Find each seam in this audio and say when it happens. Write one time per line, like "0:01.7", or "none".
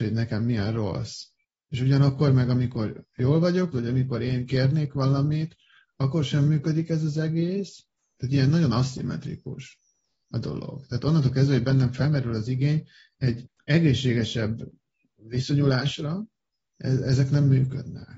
0:03.7